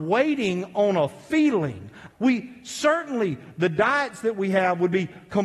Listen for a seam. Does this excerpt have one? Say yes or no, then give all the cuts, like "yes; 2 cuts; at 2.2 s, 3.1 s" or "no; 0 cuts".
yes; 1 cut; at 2.1 s